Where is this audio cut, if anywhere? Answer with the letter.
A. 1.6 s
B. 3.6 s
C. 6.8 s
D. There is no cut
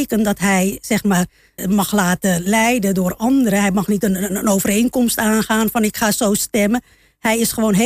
A